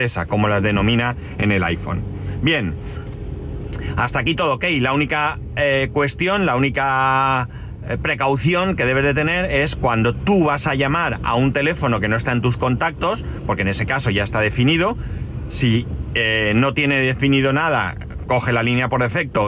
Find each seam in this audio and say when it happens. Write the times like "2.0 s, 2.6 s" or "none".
none